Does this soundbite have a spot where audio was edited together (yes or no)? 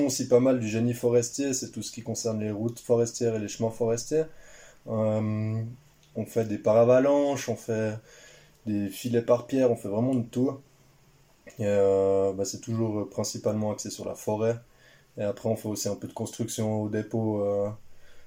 no